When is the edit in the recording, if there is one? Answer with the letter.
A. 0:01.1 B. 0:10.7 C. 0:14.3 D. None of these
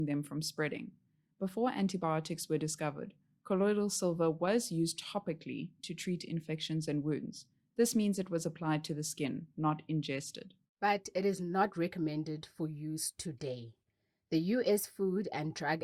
D